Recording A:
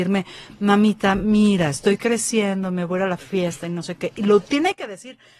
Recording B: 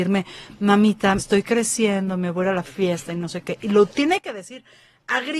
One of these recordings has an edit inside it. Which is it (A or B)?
B